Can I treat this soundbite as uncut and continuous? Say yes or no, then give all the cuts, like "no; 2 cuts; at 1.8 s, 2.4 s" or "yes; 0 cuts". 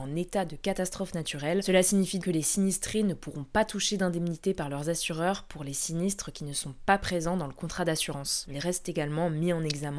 no; 2 cuts; at 2.2 s, 8.5 s